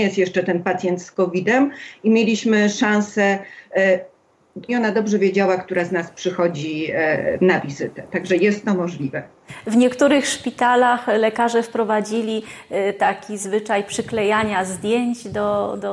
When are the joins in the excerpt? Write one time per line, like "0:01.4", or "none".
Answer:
0:04.7